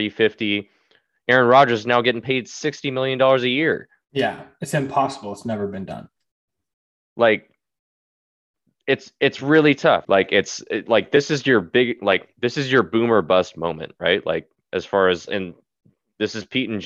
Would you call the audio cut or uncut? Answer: cut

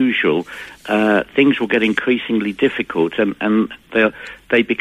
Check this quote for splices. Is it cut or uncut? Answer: uncut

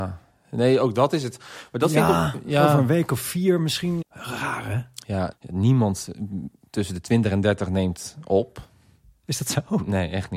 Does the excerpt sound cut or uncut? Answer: cut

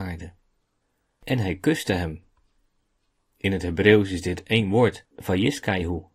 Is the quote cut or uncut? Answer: uncut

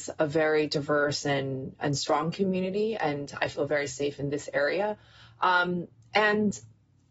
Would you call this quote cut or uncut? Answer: uncut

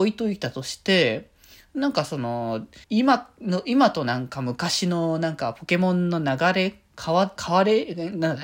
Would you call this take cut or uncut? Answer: cut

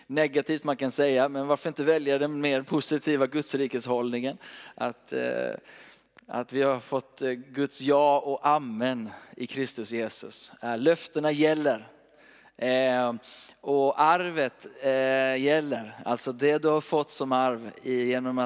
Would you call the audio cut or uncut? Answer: uncut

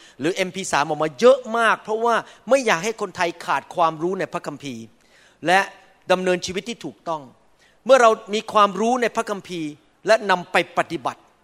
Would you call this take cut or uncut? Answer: uncut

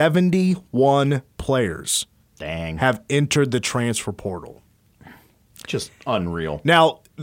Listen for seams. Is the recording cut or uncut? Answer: uncut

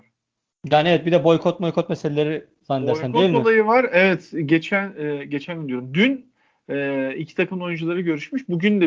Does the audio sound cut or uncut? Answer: uncut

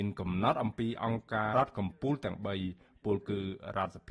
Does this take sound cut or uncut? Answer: cut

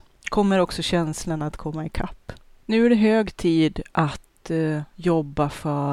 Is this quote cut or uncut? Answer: uncut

